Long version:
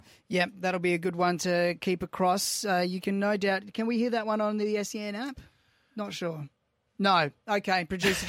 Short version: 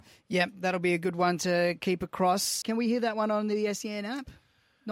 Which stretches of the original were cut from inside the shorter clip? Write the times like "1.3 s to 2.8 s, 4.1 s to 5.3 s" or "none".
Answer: 2.6 s to 3.7 s